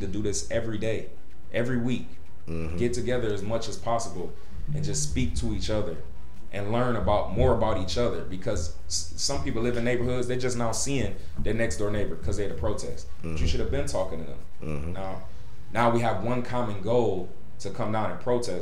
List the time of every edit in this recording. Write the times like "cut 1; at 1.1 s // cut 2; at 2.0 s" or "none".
cut 1; at 14.9 s